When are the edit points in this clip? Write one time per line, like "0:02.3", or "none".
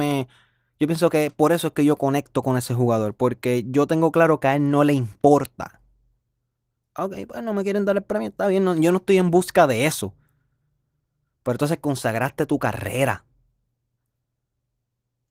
none